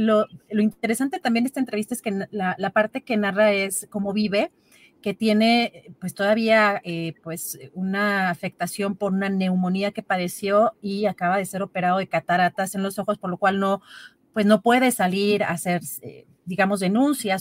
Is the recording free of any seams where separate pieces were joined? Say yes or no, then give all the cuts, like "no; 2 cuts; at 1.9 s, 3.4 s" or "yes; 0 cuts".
yes; 0 cuts